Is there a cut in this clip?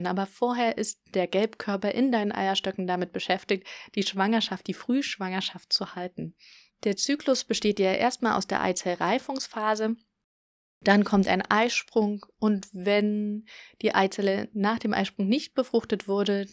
yes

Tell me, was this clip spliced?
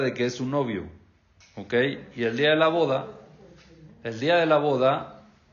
no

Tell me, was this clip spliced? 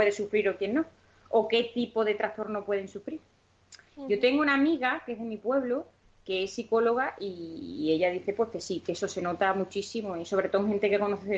no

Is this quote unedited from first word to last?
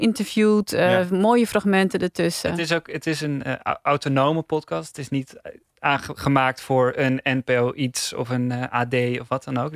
yes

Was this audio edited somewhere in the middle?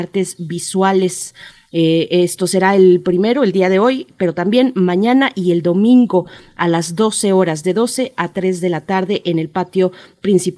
no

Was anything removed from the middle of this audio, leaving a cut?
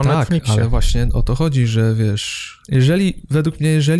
yes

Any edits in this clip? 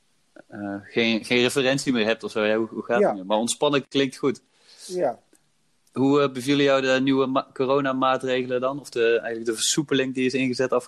no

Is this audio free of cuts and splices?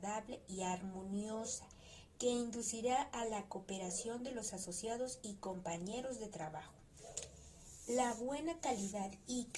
yes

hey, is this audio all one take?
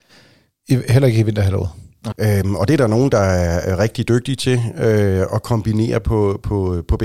no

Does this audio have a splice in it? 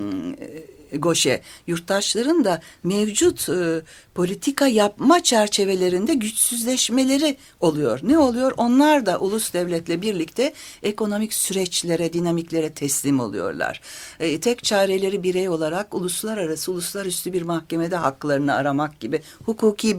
no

